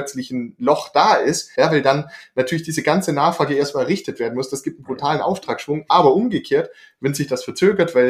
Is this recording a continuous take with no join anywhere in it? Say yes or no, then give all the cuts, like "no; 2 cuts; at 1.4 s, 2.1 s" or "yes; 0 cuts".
no; 1 cut; at 1.5 s